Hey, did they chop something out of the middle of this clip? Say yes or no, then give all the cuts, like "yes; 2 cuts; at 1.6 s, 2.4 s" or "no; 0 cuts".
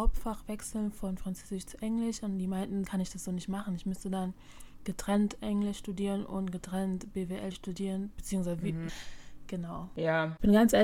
yes; 2 cuts; at 2.8 s, 8.9 s